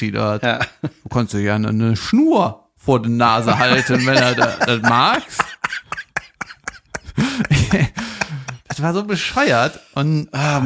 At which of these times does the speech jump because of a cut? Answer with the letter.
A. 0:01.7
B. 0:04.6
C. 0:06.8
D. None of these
B